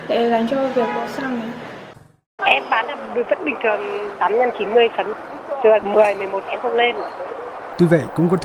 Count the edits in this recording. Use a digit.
2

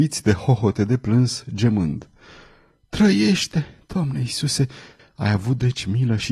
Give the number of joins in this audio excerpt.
1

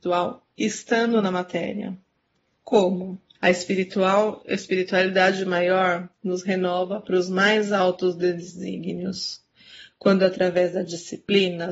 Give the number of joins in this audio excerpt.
1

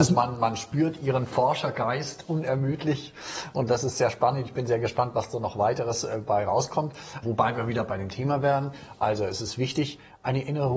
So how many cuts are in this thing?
1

